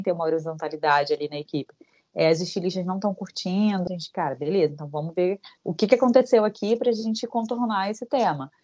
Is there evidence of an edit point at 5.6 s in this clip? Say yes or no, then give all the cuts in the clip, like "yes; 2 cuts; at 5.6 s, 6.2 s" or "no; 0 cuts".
yes; 2 cuts; at 3.9 s, 5.6 s